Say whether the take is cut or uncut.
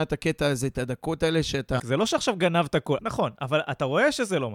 cut